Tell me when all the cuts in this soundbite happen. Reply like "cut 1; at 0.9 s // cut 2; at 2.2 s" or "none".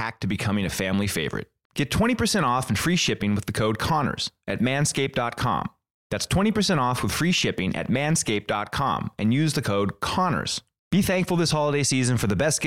none